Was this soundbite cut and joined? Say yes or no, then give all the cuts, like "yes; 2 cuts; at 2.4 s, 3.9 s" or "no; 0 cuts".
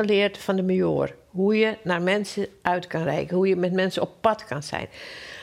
no; 0 cuts